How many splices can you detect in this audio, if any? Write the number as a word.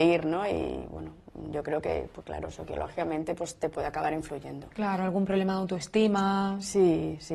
zero